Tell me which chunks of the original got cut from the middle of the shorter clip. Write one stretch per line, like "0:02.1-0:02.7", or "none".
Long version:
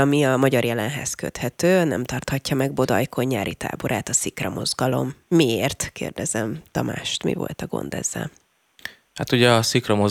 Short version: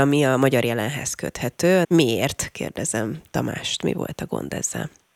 0:01.8-0:05.2

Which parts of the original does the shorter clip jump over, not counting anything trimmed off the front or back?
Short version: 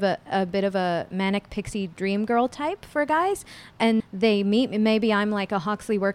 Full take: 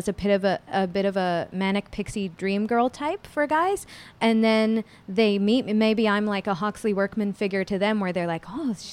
0:04.4-0:05.0

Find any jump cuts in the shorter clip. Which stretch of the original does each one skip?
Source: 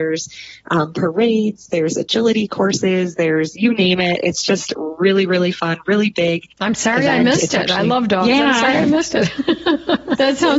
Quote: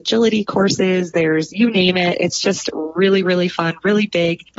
none

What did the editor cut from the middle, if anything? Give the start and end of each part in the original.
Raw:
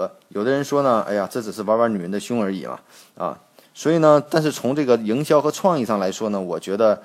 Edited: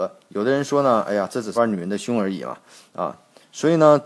0:01.6-0:01.8

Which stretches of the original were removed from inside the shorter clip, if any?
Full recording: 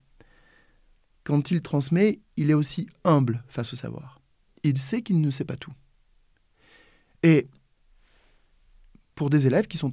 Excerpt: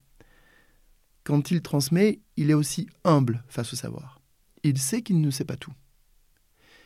none

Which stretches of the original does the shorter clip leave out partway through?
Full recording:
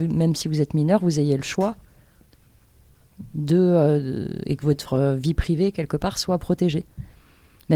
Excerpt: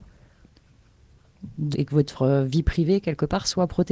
0:03.5-0:04.4

